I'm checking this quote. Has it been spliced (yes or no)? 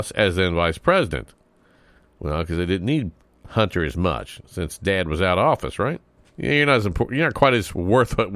yes